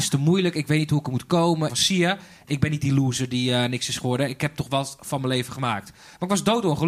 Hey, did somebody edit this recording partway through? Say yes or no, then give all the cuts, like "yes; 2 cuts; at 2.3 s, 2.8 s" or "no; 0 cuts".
yes; 1 cut; at 1.7 s